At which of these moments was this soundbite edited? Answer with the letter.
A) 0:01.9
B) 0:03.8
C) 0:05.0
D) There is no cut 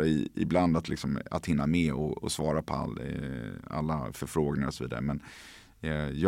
D